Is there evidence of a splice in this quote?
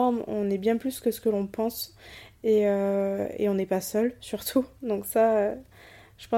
no; 0 cuts

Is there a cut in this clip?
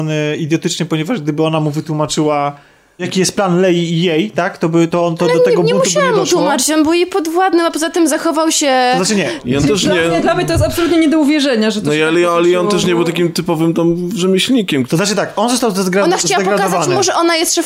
no; 0 cuts

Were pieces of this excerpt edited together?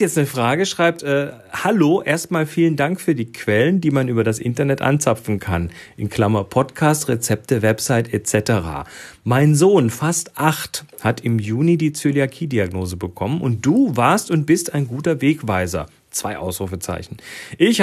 no; 0 cuts

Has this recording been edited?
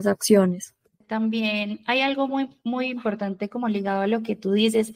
yes; 1 cut; at 1.0 s

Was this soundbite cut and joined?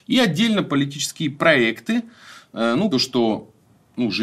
yes; 1 cut; at 2.9 s

